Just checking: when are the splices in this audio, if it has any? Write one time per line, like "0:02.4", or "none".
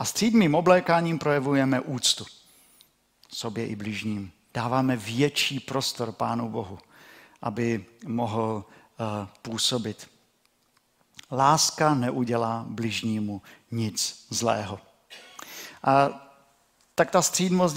0:04.5